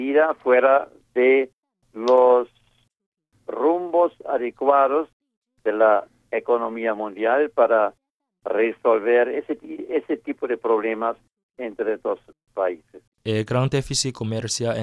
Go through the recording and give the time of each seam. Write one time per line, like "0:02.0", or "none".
0:13.1